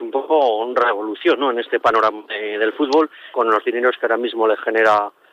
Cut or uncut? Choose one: cut